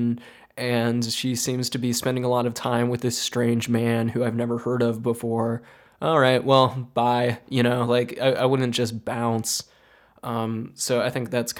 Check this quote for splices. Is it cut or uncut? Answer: uncut